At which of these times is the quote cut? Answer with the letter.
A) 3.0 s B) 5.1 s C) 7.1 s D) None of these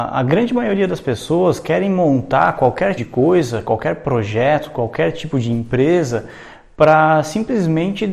A